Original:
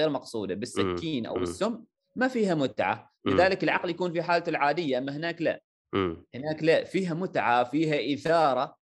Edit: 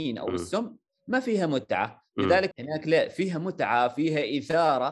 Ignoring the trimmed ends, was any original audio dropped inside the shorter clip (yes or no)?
yes